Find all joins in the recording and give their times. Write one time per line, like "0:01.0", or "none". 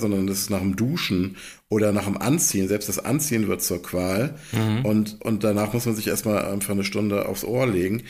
none